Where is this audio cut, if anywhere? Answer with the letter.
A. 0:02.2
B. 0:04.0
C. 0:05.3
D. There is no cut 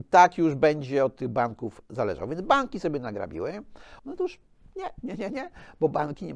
B